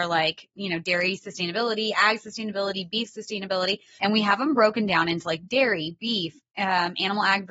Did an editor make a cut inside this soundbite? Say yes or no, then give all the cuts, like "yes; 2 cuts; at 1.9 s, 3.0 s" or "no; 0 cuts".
yes; 1 cut; at 4.0 s